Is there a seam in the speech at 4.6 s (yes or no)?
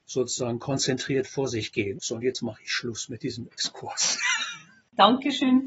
no